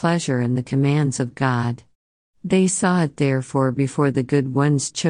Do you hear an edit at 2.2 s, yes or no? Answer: no